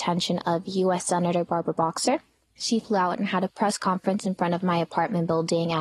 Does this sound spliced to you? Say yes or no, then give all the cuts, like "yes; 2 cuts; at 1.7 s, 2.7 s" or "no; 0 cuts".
no; 0 cuts